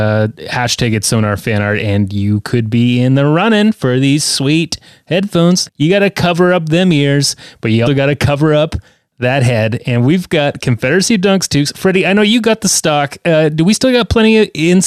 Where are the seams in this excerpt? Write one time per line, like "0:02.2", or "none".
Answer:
0:05.7
0:07.9